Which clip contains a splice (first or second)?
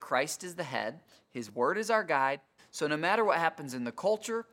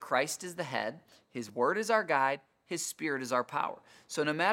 first